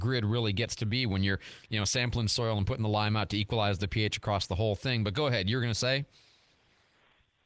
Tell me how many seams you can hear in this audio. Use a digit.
0